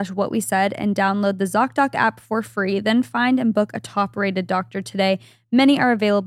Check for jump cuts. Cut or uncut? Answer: uncut